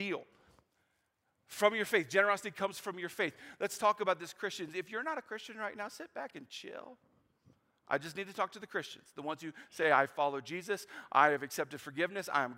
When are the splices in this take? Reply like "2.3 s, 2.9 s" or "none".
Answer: none